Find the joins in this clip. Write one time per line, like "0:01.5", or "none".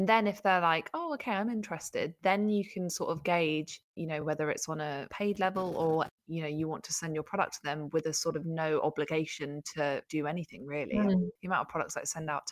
none

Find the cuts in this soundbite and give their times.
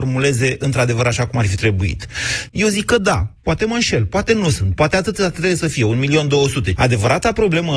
0:02.5
0:06.8

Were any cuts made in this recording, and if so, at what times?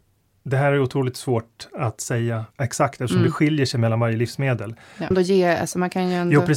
0:02.5
0:05.1

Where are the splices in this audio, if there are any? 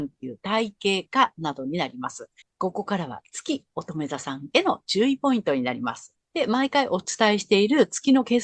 0:02.4
0:06.2

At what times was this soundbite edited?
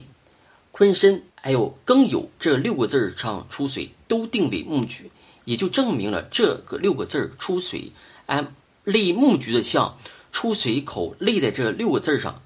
0:01.3

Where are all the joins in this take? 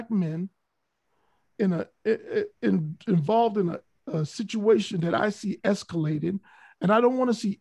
none

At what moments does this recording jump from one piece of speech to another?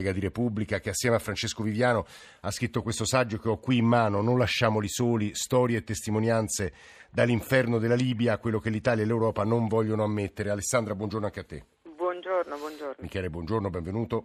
0:13.0

